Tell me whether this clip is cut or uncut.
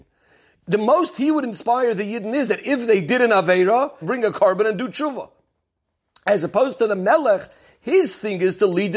cut